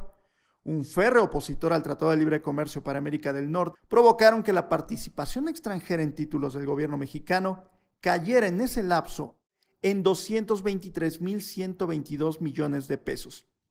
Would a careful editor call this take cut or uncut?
cut